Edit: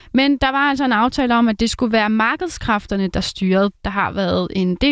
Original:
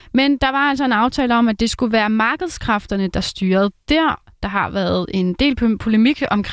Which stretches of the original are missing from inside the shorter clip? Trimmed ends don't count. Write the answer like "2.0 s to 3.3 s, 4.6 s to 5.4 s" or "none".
3.7 s to 4.3 s